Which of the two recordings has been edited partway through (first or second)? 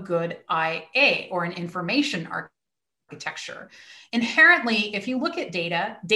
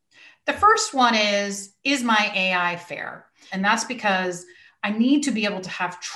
second